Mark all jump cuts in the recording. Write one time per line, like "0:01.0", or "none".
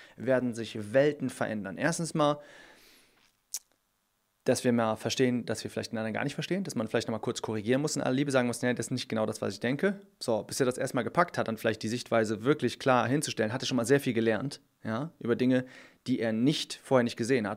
none